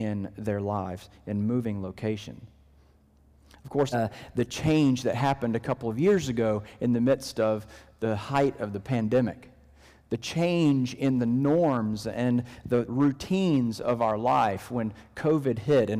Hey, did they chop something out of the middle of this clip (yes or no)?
yes